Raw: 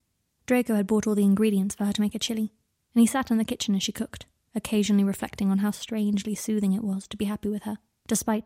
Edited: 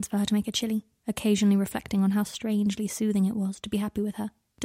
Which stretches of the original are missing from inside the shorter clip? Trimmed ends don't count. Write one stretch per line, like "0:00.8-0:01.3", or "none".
0:02.7-0:04.5

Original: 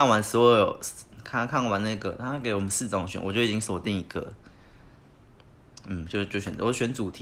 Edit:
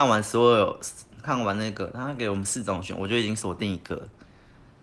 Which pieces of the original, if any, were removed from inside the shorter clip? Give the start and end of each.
0:01.2-0:01.5

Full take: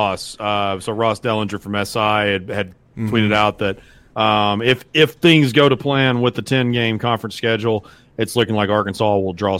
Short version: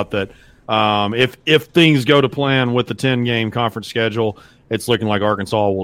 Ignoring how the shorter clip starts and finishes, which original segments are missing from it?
none

